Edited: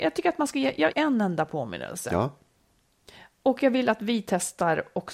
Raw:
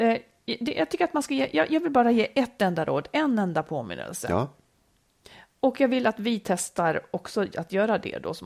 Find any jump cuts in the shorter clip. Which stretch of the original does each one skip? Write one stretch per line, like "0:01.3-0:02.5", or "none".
0:01.7-0:03.1